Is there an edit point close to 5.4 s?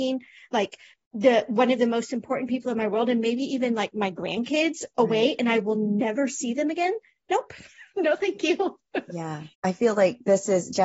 no; 1 cut; at 9.5 s

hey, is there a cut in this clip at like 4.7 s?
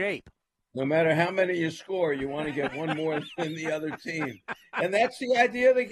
no; 0 cuts

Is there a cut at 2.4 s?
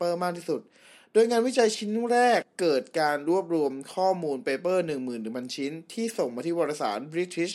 yes; 1 cut; at 2.4 s

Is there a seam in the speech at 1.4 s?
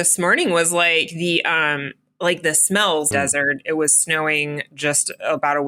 no; 1 cut; at 3.1 s

